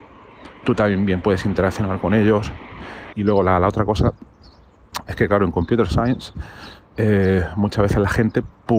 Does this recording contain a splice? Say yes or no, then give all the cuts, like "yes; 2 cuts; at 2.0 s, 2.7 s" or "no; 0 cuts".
yes; 1 cut; at 3.1 s